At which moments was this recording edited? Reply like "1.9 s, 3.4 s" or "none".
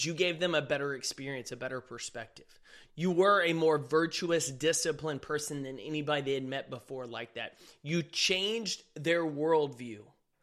2.8 s